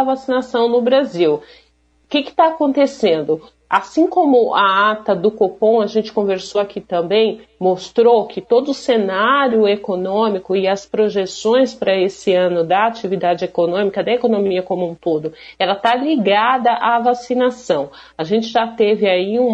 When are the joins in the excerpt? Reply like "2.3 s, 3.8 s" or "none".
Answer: none

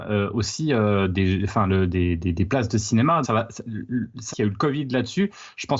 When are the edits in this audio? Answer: 3.2 s, 4.3 s

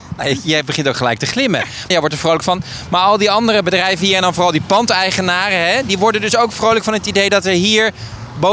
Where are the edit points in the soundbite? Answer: 1.9 s

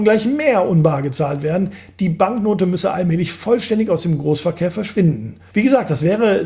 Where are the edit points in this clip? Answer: 5.5 s

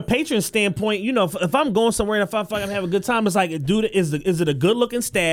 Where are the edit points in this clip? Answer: none

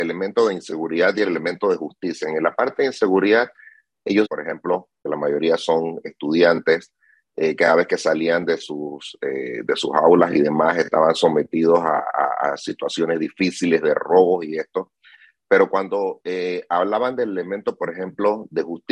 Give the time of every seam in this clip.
4.3 s

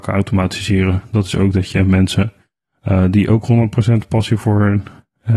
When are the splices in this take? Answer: none

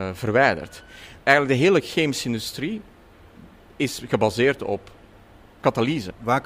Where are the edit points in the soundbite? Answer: 1.2 s

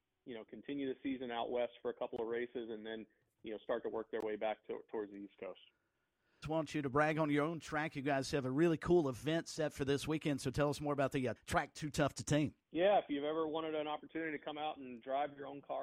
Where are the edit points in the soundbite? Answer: 6.4 s, 11.4 s, 12.6 s

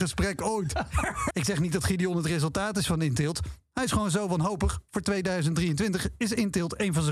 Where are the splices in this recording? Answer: 1.3 s

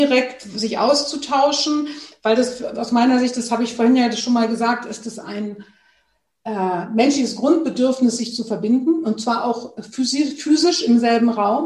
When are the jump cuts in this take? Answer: none

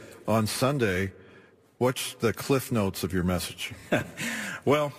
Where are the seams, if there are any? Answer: none

